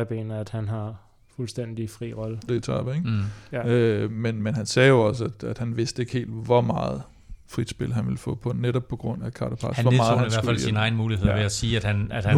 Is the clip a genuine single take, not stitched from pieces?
no; 2 cuts; at 2.5 s, 9.2 s

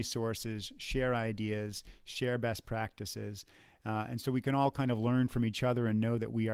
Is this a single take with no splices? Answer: yes; 0 cuts

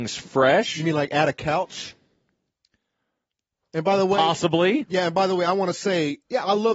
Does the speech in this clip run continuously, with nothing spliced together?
yes; 0 cuts

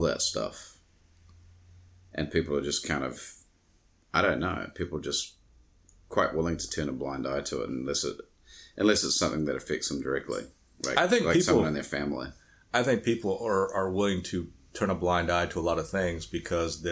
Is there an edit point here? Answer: no; 0 cuts

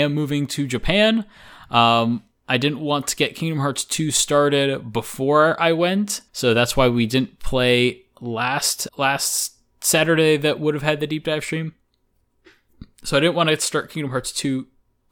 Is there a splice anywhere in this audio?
yes; 2 cuts; at 6.3 s, 8.9 s

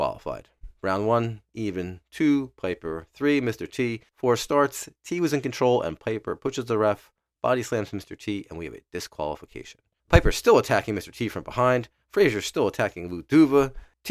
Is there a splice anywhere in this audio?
no; 0 cuts

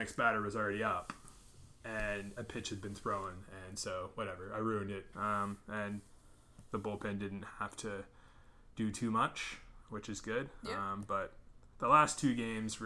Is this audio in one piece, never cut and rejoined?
no; 1 cut; at 5.1 s

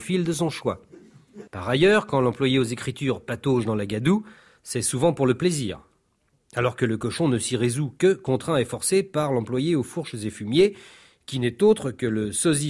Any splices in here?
yes; 1 cut; at 1.5 s

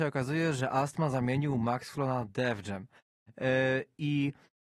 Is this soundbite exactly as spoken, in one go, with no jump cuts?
yes; 0 cuts

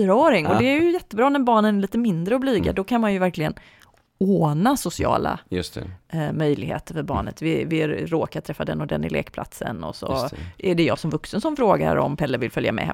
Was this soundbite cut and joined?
no; 0 cuts

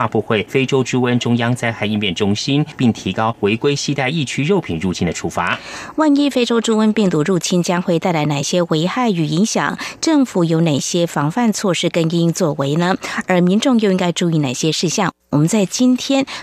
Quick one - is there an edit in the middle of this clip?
yes; 1 cut; at 2.8 s

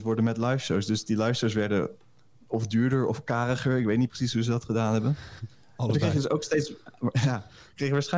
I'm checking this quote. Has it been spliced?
no; 0 cuts

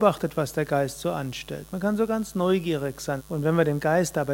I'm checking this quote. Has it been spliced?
yes; 1 cut; at 3.2 s

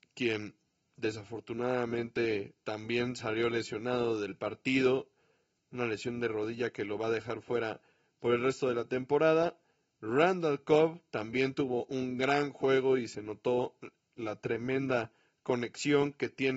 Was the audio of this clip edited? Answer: no; 0 cuts

